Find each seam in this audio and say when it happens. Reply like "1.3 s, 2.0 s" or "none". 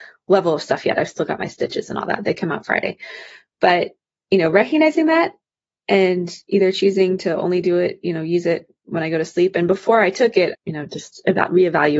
10.5 s